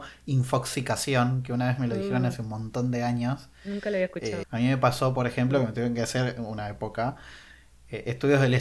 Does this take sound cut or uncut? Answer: cut